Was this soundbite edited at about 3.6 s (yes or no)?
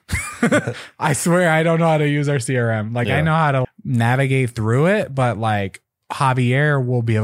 yes